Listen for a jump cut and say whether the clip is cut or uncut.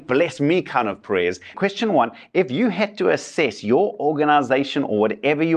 cut